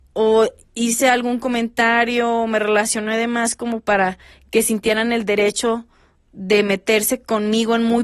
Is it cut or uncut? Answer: uncut